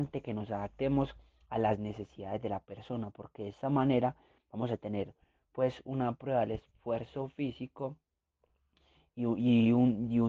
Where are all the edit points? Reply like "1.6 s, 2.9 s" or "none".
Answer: none